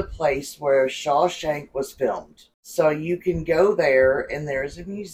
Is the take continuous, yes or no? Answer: yes